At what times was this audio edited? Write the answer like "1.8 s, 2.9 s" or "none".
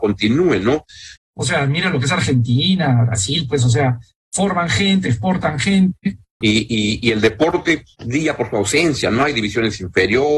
1.2 s, 6.4 s

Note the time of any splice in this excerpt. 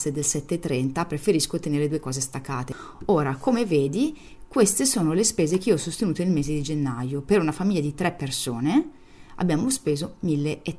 none

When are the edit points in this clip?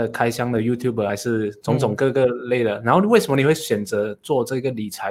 1.1 s

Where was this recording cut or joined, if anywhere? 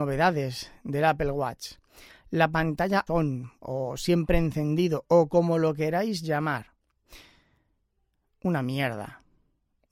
3.1 s

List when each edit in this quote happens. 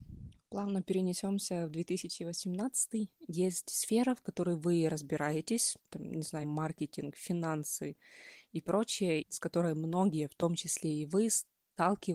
3.3 s, 6.4 s, 9.2 s

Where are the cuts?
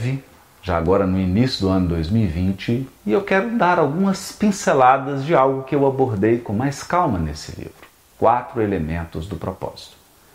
8.1 s

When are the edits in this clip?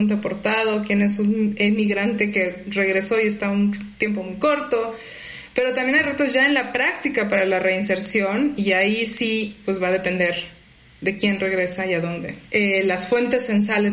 12.5 s

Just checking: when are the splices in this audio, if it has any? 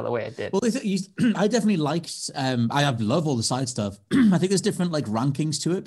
none

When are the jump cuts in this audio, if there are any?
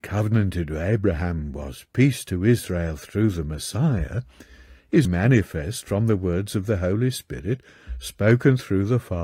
5.1 s

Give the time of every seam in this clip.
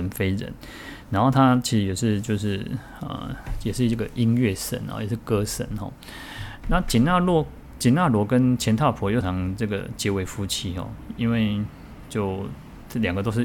6.6 s, 9.2 s

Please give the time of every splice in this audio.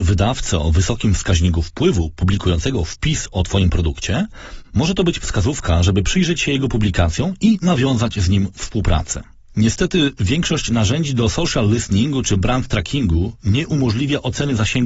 none

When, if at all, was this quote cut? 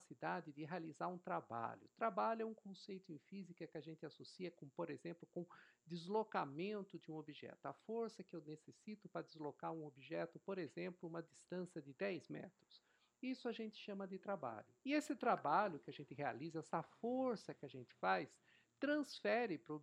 14.8 s

